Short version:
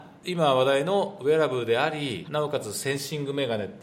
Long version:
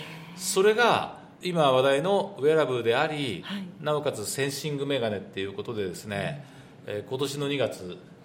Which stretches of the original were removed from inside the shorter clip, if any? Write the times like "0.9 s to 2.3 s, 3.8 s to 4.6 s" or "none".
3.4 s to 3.8 s